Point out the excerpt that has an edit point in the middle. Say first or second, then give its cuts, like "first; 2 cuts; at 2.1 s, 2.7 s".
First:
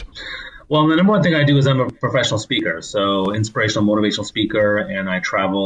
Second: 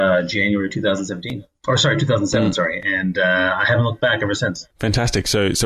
second; 1 cut; at 4.7 s